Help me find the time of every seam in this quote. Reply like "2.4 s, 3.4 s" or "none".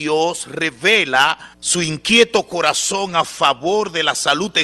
1.5 s